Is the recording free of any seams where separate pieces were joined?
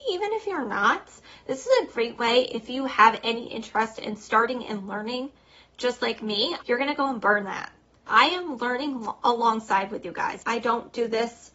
no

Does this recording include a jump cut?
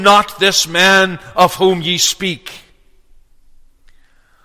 no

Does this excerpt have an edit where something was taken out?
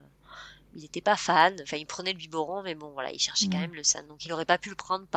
no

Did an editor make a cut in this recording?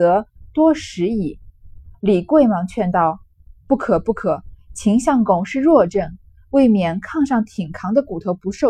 yes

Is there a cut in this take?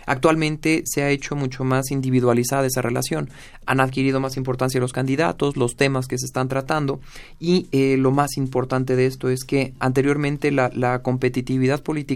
no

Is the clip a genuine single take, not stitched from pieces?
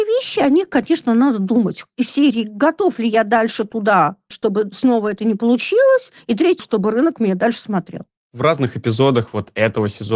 no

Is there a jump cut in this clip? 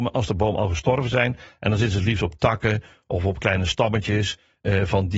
no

